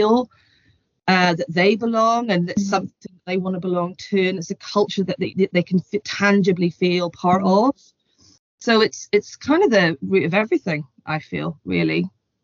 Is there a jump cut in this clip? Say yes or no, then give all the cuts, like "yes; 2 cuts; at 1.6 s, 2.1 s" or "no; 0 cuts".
no; 0 cuts